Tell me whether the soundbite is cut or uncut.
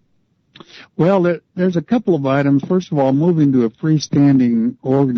uncut